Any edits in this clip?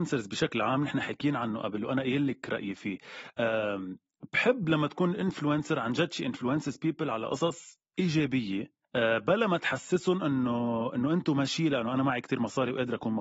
yes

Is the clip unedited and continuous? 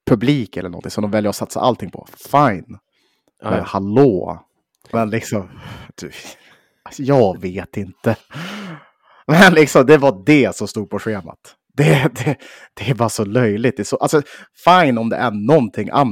no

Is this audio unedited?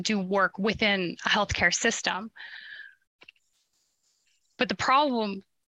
yes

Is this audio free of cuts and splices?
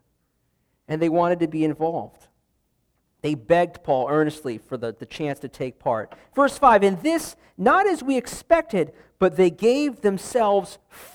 yes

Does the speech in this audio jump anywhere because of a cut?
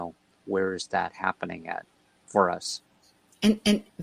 no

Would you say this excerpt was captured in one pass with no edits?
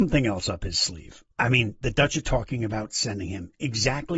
no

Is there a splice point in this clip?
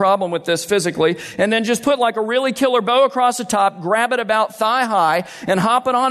no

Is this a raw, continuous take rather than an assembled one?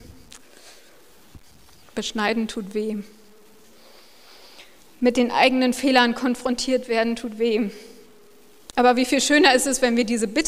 yes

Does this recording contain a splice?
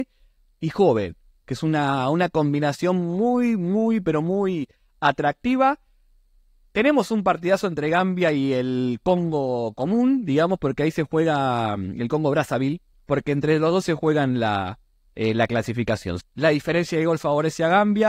yes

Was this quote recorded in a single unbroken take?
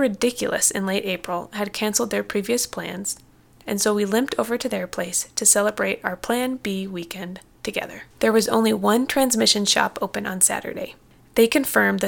no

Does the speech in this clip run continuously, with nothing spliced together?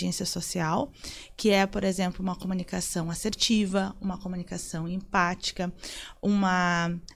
yes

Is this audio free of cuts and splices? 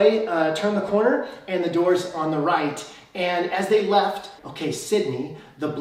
no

